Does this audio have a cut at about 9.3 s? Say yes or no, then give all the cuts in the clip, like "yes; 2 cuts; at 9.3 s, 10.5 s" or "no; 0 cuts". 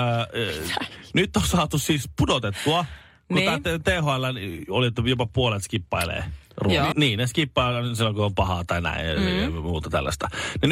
no; 1 cut; at 6.9 s